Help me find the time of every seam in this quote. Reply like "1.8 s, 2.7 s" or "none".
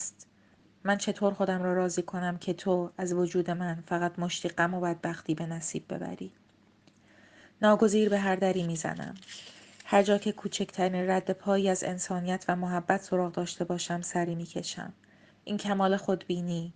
15.3 s